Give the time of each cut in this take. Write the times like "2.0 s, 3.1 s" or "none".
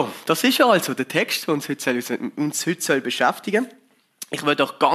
2.3 s

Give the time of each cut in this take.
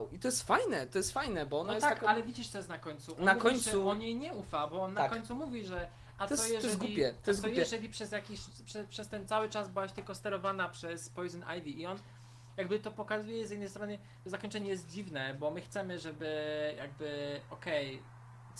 none

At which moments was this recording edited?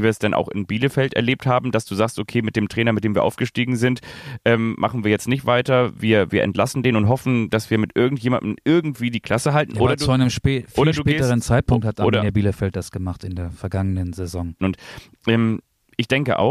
14.6 s

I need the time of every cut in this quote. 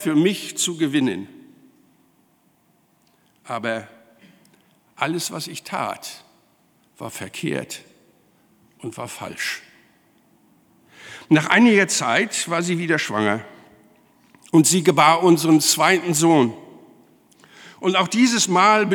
none

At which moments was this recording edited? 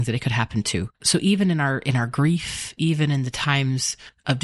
0.9 s

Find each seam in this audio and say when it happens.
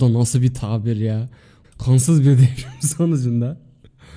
1.6 s

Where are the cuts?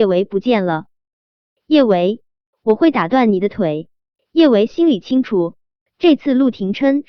1.5 s, 4.2 s

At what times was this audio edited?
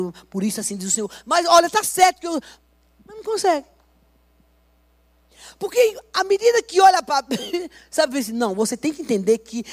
3.0 s

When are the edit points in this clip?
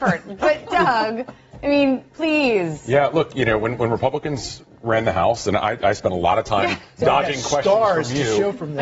2.1 s

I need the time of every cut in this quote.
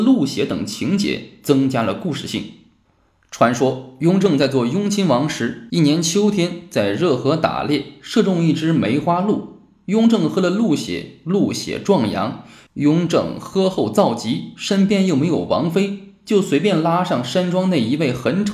none

